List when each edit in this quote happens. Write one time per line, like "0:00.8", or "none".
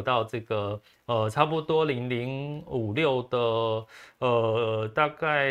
none